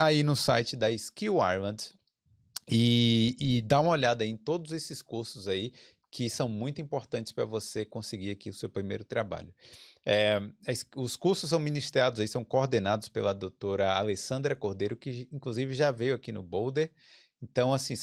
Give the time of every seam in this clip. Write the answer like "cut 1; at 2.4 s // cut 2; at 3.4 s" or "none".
none

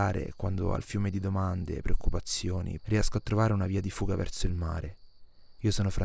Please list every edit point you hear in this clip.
cut 1; at 2.8 s

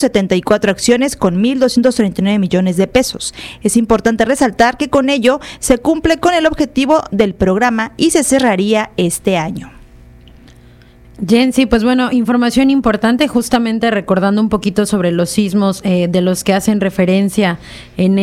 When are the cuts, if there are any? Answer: none

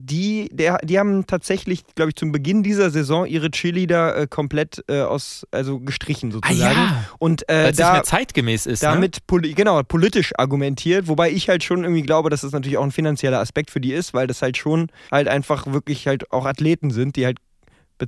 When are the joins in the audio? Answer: cut 1; at 15.1 s

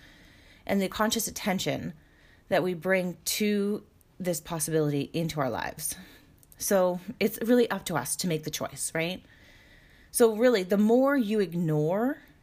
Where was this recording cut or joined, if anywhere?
none

